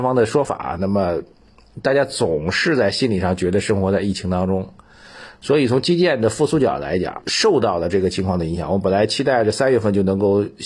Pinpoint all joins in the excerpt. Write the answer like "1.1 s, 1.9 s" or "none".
none